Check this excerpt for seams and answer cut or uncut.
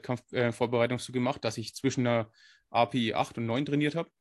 uncut